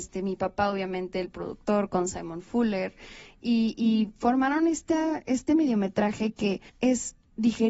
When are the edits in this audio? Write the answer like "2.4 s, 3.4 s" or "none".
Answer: 6.7 s